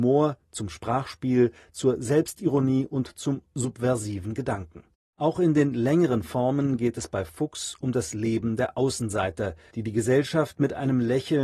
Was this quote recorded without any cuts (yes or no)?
no